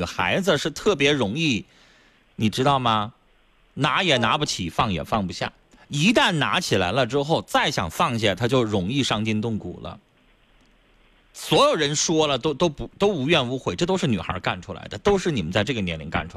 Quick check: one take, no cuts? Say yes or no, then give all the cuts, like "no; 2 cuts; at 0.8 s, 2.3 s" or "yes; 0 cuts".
no; 1 cut; at 11.2 s